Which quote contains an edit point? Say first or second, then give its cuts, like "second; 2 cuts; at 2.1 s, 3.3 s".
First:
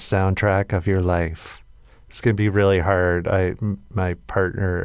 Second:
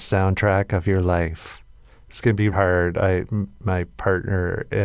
second; 1 cut; at 2.5 s